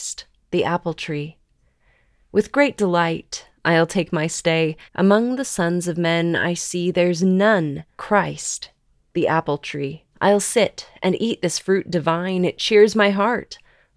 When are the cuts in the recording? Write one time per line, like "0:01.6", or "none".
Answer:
0:04.9
0:08.0
0:10.1